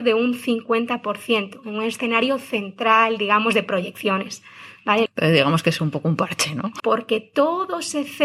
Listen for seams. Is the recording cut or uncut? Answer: cut